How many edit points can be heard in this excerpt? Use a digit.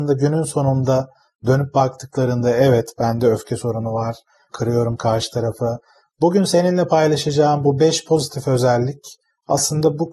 2